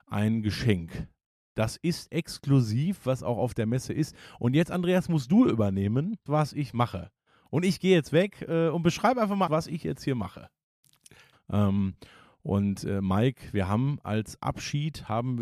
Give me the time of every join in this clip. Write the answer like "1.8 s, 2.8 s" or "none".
6.3 s, 9.5 s, 11.3 s